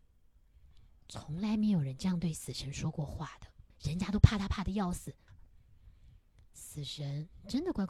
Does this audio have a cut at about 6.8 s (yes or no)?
no